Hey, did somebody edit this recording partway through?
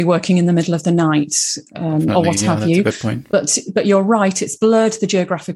no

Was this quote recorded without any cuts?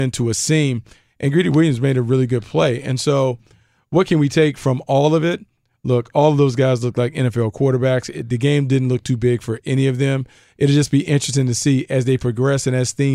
yes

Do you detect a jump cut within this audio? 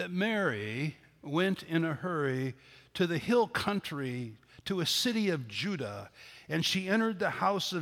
no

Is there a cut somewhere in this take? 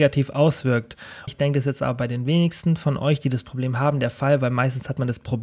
yes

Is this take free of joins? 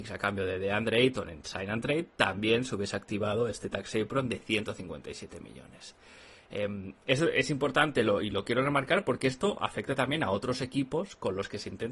yes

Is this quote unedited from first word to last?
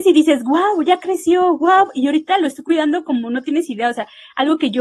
yes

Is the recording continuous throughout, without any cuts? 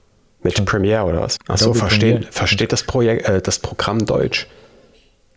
no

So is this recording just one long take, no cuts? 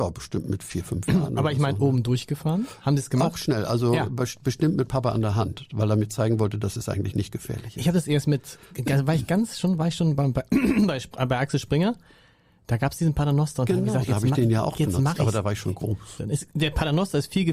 no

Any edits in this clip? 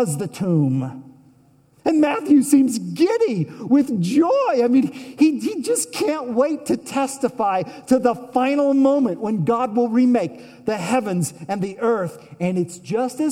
yes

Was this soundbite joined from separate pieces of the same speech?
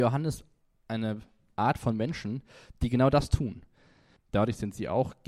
yes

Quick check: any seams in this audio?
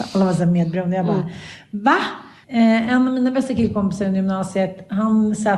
yes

